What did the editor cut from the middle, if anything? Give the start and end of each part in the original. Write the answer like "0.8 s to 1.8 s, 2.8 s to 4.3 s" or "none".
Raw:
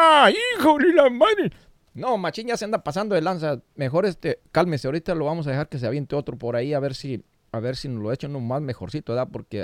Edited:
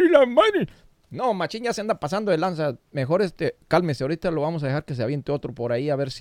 none